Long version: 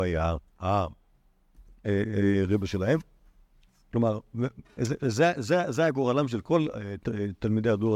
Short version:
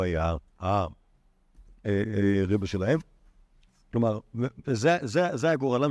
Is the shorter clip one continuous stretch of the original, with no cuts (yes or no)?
no